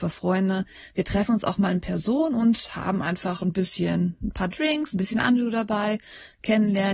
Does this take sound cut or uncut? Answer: uncut